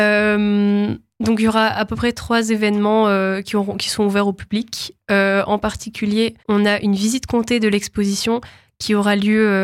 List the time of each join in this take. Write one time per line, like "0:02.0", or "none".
0:06.4